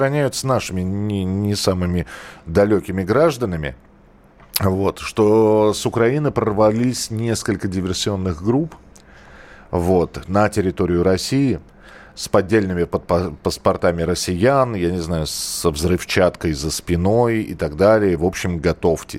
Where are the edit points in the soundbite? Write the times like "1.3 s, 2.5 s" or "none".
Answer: none